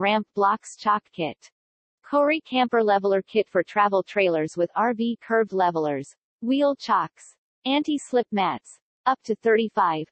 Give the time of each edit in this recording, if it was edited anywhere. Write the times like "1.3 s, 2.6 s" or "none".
none

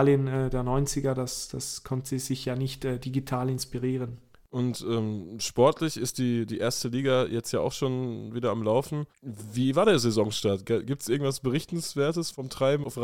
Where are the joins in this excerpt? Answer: 9.1 s

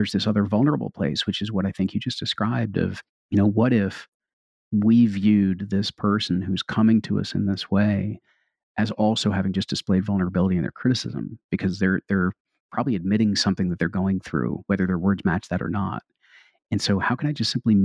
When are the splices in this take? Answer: none

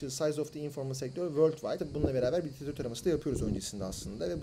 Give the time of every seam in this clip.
1.8 s

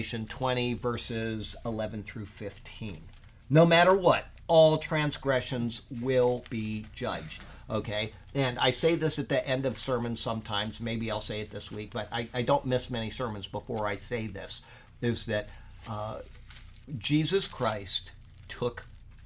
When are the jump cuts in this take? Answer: 11.9 s

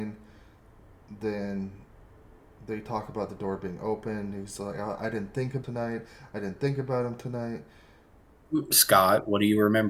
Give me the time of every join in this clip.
5.6 s, 8.7 s

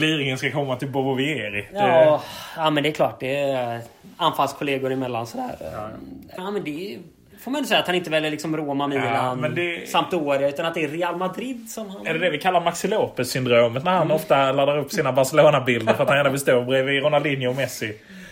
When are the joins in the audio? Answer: 6.4 s

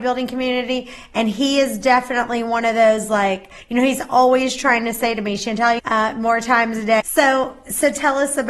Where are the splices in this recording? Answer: 5.8 s, 7.0 s

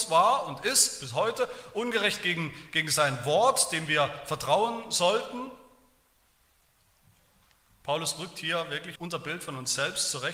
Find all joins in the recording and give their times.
9.0 s

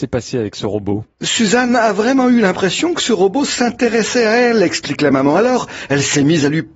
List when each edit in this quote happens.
1.1 s

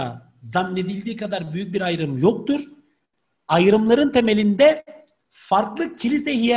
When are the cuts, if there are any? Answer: none

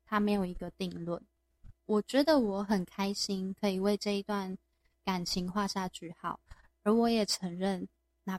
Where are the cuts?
1.7 s

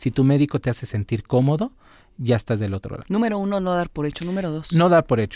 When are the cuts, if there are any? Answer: 3.0 s

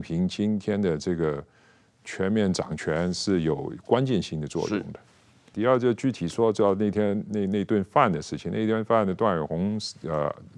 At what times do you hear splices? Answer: 5.5 s

